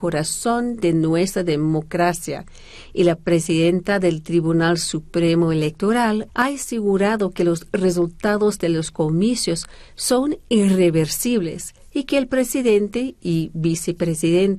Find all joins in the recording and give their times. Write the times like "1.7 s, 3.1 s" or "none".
6.3 s